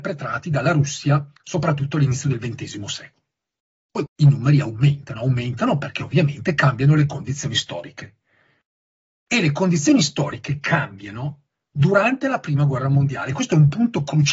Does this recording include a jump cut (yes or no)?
yes